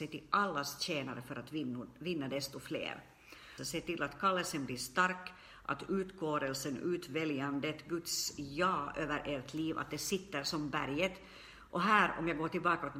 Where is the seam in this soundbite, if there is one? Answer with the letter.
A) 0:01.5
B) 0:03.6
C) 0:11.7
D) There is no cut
B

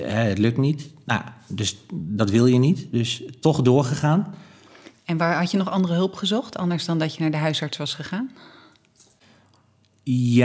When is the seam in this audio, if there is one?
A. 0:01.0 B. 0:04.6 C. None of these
C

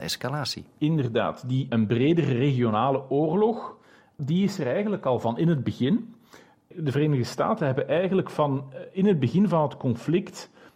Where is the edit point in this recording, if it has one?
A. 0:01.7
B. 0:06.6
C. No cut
A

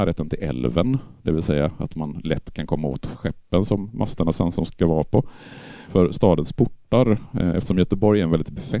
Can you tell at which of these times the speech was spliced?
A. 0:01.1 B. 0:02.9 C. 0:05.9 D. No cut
C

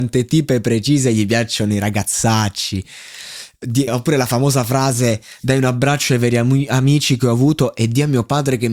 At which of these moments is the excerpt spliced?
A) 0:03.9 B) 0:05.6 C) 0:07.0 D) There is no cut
A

